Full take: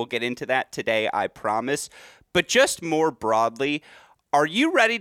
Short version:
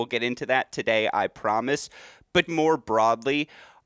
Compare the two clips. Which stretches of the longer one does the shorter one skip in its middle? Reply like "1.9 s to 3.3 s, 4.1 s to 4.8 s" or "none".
2.5 s to 2.8 s